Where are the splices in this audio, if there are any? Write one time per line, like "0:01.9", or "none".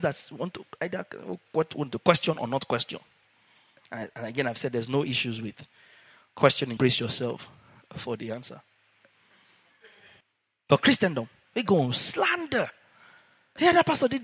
0:06.8
0:11.5